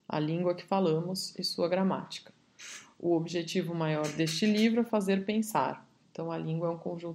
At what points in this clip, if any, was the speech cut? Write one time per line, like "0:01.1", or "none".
0:06.0